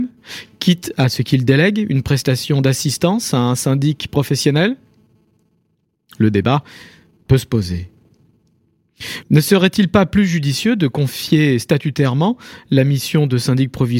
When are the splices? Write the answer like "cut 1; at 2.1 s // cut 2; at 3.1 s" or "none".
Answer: cut 1; at 9.2 s